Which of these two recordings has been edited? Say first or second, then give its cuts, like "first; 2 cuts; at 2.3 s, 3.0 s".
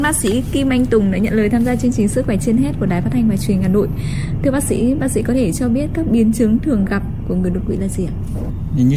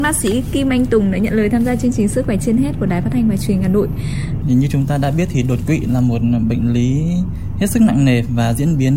second; 1 cut; at 4.4 s